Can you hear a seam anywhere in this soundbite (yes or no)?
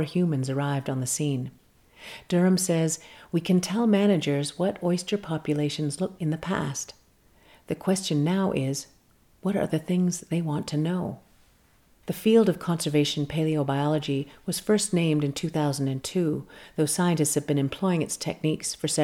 yes